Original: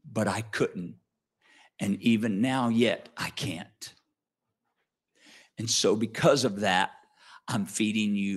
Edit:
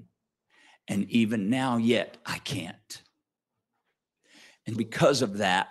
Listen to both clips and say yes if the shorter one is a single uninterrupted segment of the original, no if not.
no